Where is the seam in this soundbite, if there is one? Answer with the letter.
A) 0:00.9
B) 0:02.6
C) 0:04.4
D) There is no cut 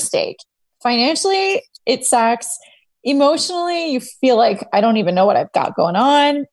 D